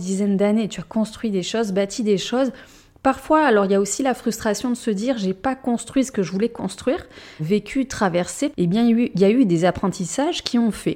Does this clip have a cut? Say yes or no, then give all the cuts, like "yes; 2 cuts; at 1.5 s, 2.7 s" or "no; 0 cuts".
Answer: yes; 2 cuts; at 7.4 s, 8.5 s